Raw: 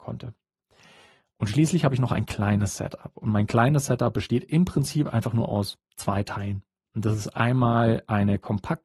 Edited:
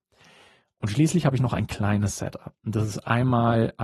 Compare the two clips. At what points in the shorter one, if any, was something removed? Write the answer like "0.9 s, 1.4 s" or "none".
2.5 s